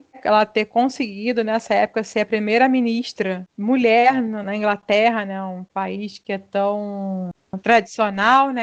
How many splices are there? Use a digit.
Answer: 2